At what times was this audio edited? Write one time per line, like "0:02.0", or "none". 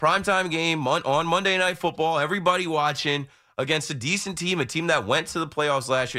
none